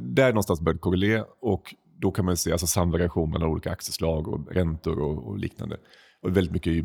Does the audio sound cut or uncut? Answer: uncut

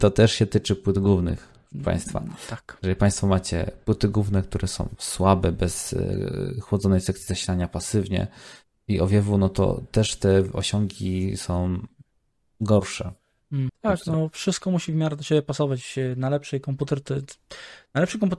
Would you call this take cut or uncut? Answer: cut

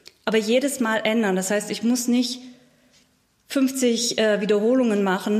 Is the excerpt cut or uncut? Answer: uncut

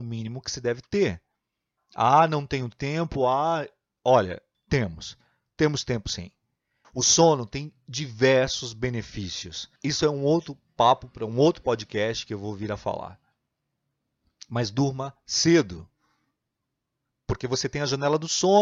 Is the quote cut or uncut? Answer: cut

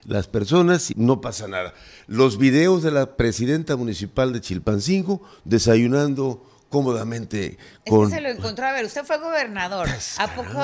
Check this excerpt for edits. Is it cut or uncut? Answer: cut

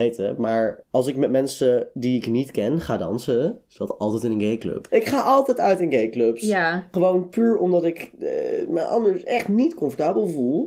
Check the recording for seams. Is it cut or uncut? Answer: cut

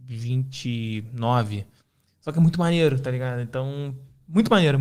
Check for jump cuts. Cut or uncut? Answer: uncut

